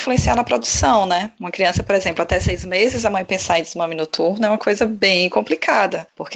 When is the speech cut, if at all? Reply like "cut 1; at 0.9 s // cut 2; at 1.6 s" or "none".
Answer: none